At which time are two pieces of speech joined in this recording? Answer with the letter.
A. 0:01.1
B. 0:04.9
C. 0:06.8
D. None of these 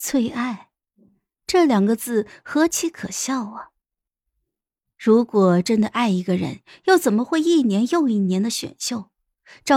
D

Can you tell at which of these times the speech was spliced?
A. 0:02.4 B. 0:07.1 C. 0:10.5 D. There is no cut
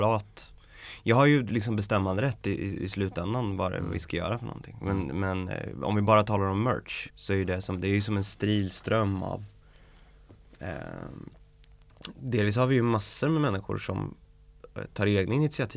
B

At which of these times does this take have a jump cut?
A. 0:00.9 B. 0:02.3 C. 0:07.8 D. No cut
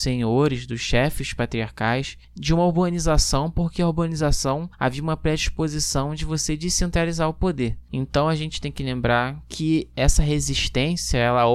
D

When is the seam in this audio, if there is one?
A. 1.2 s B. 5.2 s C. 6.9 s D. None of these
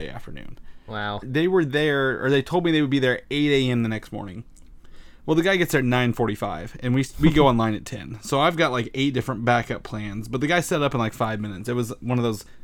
A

